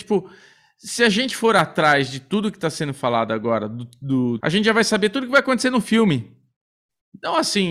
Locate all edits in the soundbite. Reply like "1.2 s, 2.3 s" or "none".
4.4 s